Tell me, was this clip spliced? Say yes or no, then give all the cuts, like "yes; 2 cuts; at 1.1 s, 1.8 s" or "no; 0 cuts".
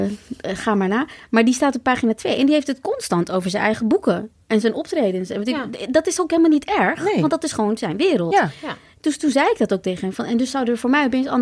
no; 0 cuts